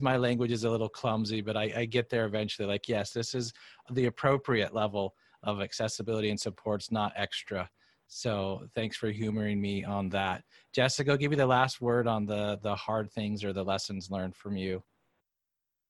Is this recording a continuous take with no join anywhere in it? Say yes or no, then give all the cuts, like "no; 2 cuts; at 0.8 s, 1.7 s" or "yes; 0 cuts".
yes; 0 cuts